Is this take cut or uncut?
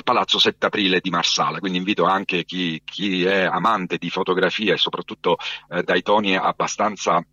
uncut